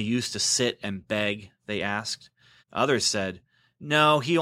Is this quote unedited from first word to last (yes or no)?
no